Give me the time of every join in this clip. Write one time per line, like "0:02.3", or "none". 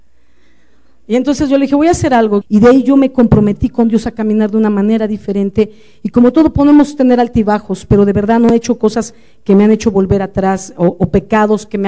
0:02.4